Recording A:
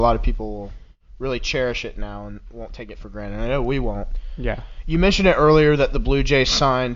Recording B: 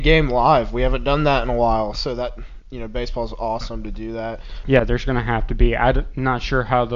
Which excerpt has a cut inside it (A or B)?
B